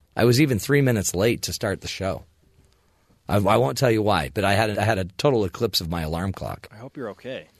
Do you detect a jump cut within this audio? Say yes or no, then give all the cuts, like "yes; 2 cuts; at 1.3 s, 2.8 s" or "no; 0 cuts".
yes; 1 cut; at 4.7 s